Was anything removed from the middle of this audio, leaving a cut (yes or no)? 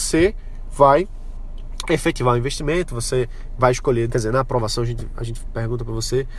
yes